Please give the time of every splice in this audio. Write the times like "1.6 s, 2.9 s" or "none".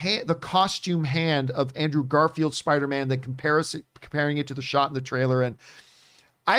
none

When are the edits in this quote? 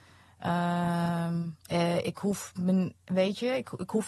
1.6 s

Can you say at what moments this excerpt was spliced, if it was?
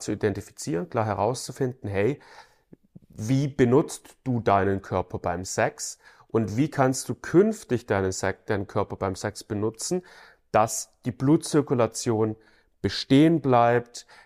none

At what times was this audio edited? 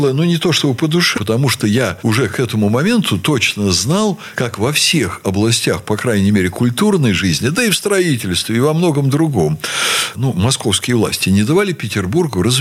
1.2 s, 10.1 s

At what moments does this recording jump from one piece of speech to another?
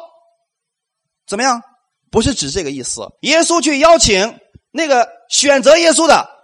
1.9 s, 3.2 s

